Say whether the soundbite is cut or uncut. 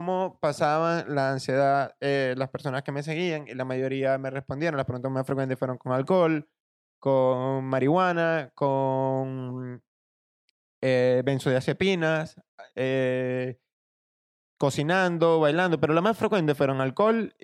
uncut